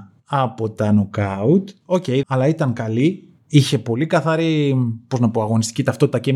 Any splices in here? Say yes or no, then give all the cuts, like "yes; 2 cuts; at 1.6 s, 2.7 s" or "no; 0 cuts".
yes; 1 cut; at 2.2 s